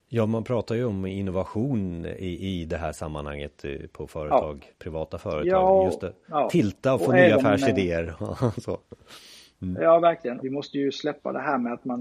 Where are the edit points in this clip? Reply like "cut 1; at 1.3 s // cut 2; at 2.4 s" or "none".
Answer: cut 1; at 10.4 s